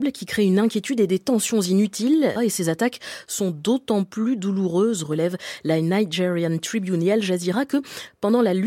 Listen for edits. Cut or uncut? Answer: cut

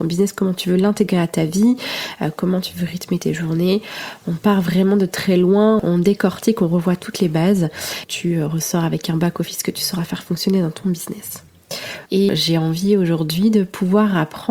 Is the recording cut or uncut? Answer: cut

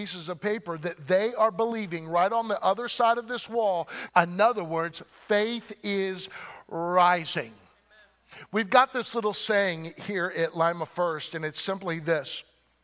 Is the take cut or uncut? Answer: cut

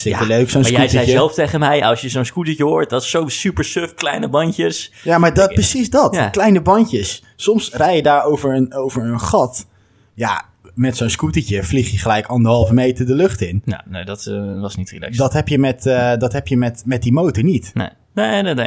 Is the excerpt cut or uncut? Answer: uncut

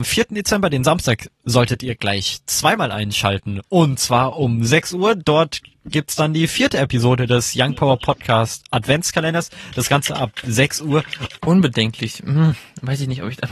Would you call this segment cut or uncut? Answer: cut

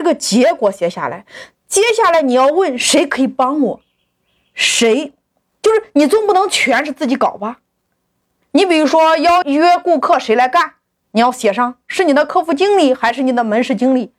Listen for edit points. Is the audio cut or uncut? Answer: cut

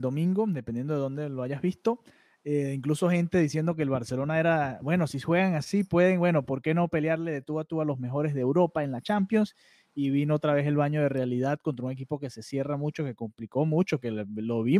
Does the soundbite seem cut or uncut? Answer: uncut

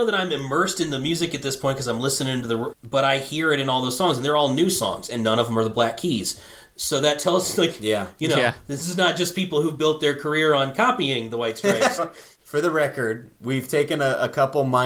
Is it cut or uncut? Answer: cut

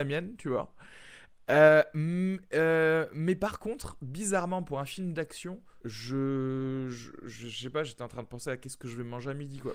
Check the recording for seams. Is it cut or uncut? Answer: cut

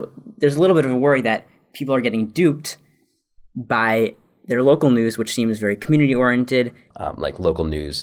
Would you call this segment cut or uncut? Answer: cut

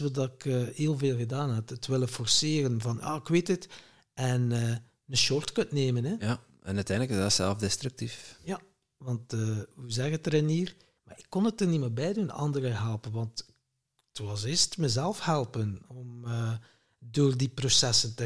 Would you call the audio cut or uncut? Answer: cut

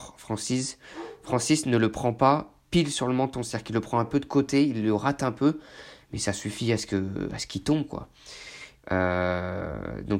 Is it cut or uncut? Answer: cut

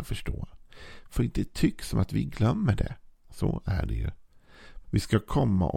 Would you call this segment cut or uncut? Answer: cut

